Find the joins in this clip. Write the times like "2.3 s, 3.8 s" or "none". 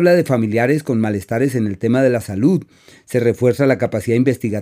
none